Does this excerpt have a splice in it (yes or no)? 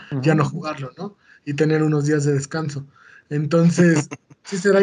no